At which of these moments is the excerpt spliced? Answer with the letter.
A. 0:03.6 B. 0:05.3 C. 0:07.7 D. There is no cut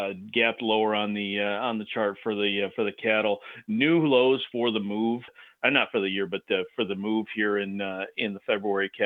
B